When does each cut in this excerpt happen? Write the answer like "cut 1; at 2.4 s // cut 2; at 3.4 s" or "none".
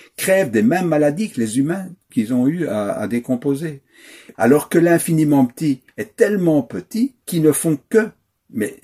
cut 1; at 4.3 s // cut 2; at 7.2 s